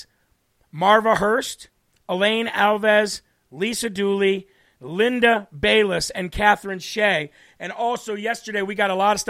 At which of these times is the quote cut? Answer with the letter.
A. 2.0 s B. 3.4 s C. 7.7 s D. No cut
D